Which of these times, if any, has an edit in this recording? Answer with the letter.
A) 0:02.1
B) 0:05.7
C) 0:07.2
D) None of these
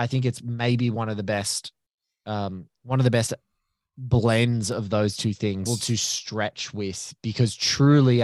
B